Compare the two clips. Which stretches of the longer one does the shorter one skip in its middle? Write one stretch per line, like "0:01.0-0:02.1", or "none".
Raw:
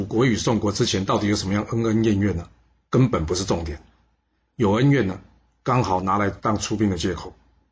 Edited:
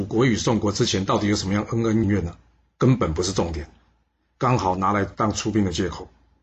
0:02.0-0:02.2
0:04.5-0:05.6

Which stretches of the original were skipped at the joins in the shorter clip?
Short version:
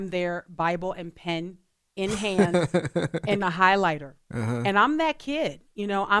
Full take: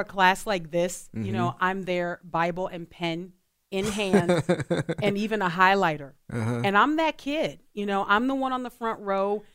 0:05.1-0:05.4

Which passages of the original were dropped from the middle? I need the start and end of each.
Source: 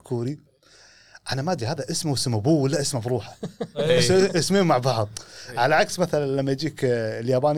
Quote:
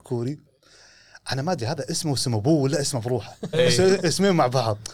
0:03.5-0:03.8

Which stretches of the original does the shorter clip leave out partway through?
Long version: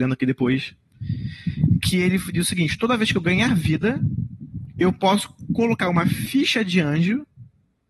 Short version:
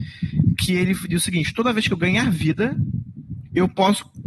none

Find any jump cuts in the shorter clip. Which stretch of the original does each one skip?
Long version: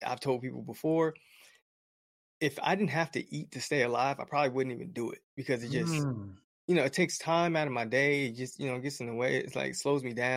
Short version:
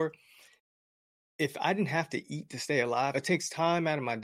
0:04.2-0:06.8

